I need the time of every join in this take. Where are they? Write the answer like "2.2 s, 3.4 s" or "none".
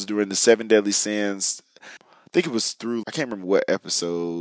2.0 s, 3.0 s